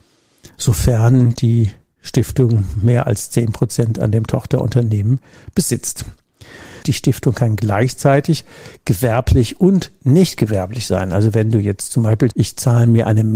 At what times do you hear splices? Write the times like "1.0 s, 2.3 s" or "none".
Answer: 6.8 s, 12.3 s